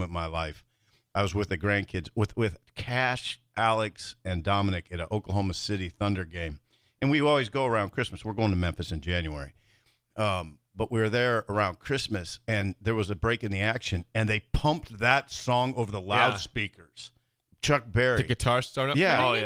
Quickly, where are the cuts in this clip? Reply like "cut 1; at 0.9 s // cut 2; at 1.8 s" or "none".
none